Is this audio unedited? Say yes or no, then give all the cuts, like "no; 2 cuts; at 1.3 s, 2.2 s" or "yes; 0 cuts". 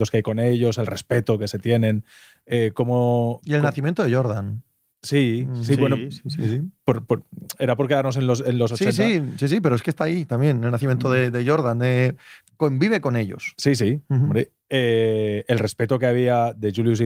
yes; 0 cuts